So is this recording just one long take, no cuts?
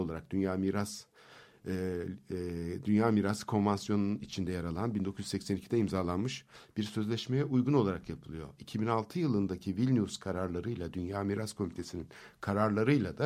yes; 0 cuts

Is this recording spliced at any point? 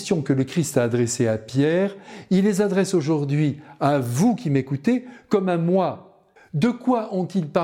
yes; 1 cut; at 6.4 s

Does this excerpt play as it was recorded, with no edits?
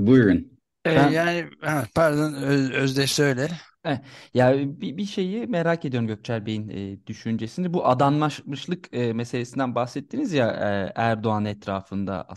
yes; 0 cuts

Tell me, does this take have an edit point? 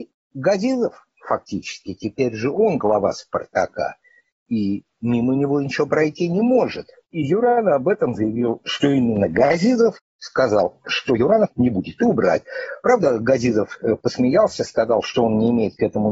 no; 0 cuts

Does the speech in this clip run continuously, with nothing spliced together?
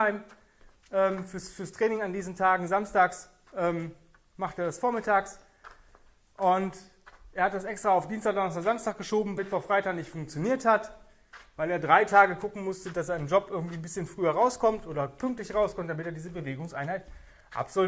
no; 1 cut; at 9.4 s

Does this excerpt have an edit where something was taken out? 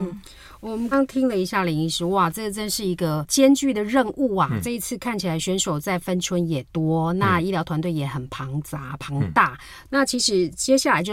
yes; 2 cuts; at 0.9 s, 9.9 s

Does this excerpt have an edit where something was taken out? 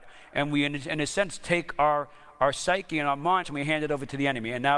yes; 1 cut; at 3.4 s

